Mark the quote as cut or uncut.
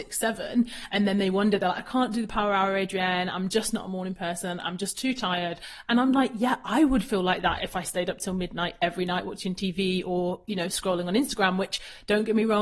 uncut